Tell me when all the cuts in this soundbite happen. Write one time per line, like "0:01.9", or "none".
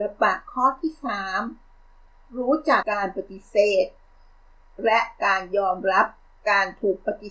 0:02.8